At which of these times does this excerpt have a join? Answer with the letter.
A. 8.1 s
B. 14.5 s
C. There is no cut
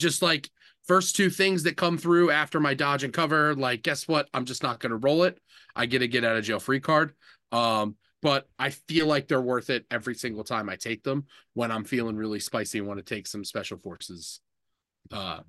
A